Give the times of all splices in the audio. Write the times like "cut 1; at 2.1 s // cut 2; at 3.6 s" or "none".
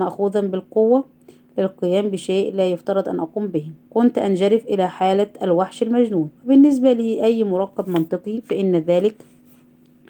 cut 1; at 3.8 s // cut 2; at 6.4 s

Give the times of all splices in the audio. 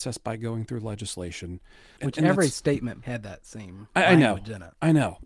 cut 1; at 2.0 s // cut 2; at 3.0 s

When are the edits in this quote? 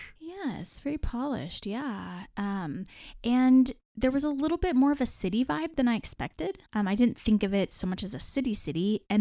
cut 1; at 6.7 s

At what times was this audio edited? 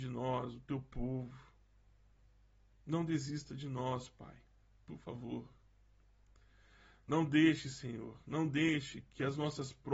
none

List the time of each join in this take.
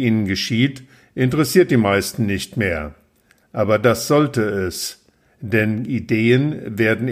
none

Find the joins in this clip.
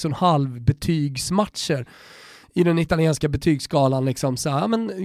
none

